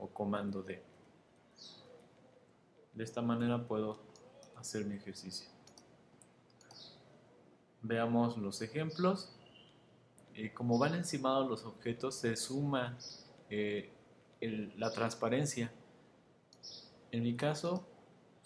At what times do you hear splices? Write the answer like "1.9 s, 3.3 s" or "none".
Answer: 10.2 s